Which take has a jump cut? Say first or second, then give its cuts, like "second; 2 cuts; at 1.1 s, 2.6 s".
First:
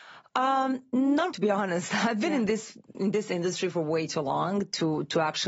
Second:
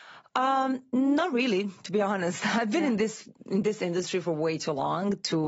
first; 1 cut; at 1.3 s